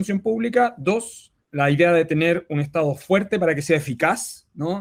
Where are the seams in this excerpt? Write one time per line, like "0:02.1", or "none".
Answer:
0:01.4